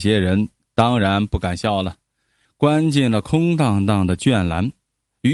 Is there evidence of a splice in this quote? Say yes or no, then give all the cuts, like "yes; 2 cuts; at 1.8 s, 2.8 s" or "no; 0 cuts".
yes; 1 cut; at 2.5 s